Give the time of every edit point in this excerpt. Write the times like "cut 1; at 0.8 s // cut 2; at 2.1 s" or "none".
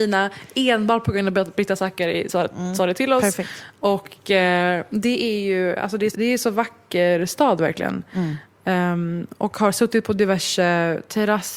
cut 1; at 6.1 s